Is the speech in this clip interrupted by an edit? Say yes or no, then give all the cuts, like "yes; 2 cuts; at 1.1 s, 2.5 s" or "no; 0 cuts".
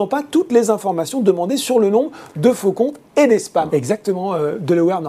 yes; 1 cut; at 3.7 s